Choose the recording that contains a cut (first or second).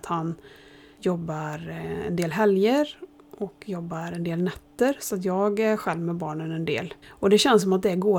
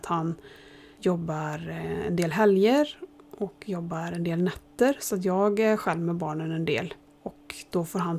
first